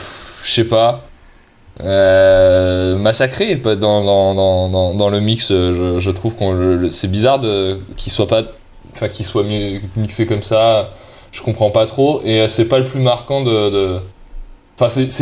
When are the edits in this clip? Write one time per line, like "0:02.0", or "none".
none